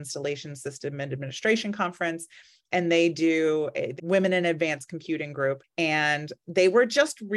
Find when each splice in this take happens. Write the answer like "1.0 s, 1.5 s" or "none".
4.0 s